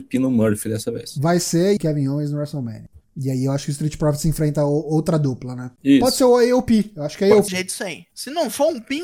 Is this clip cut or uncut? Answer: cut